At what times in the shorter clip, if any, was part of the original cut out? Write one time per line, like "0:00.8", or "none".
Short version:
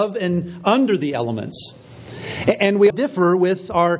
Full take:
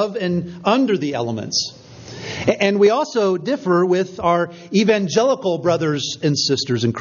0:02.9